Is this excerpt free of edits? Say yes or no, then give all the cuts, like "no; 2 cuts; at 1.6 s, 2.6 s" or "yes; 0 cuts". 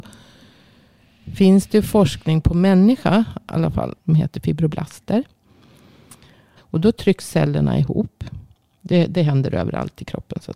no; 2 cuts; at 4.0 s, 6.6 s